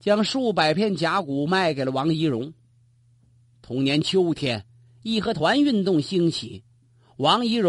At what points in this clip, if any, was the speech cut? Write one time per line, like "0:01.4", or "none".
none

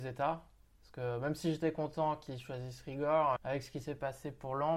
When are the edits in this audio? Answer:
0:03.4

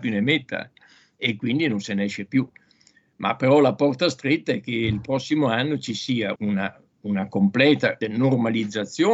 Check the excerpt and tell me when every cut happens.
0:06.4
0:08.0

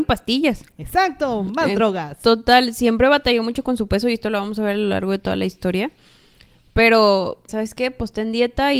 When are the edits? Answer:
0:07.5

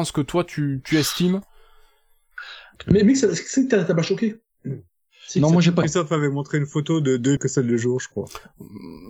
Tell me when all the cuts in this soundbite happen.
0:02.8
0:05.8
0:07.4

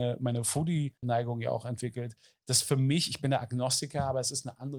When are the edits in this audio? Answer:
none

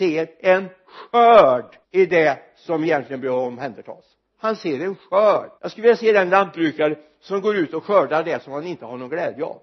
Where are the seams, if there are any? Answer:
0:01.8
0:05.6

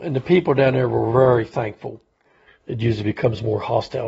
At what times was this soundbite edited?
0:02.5

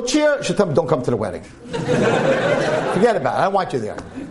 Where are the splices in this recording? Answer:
none

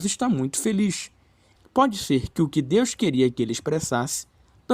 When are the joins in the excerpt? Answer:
0:01.6

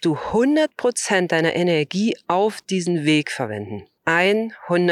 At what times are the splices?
0:04.0

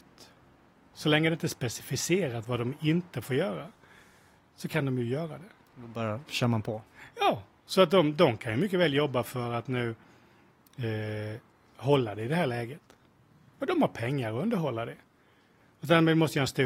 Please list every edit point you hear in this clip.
0:00.9

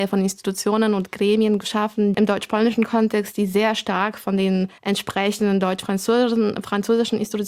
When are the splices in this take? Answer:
0:02.1
0:04.8

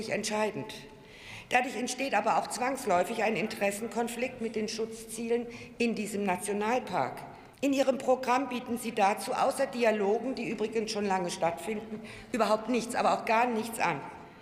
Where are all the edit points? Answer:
0:07.5

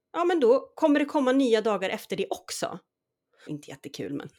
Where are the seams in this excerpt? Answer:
0:03.5

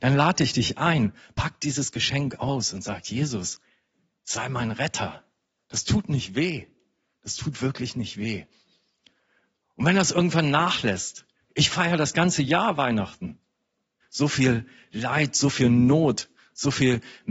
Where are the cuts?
0:11.4
0:14.0

